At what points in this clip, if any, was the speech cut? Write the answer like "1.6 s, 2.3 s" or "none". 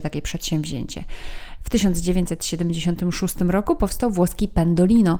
1.6 s